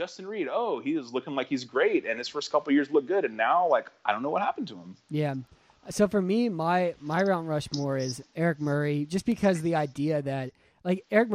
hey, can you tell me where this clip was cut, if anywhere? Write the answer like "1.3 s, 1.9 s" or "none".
none